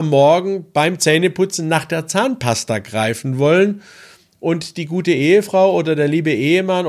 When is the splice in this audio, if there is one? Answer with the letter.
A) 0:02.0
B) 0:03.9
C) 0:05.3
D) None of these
D